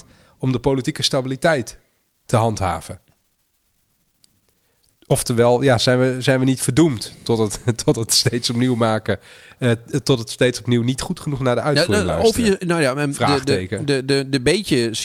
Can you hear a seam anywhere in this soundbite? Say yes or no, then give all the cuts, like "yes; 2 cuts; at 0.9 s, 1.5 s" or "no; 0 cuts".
no; 0 cuts